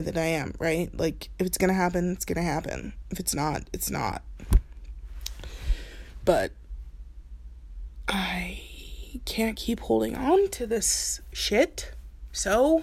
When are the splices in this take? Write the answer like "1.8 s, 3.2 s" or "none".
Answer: none